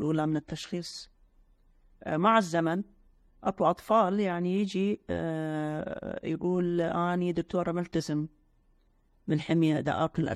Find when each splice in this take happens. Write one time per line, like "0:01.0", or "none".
none